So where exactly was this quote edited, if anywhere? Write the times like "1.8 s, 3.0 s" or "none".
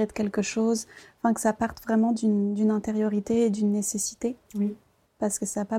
none